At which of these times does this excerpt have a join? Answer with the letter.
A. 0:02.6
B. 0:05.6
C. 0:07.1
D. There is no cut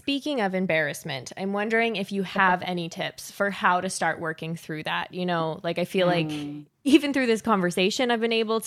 D